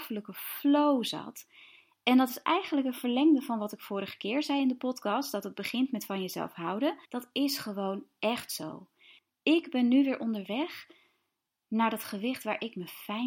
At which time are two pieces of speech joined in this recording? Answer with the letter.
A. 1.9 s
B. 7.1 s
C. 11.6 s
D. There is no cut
B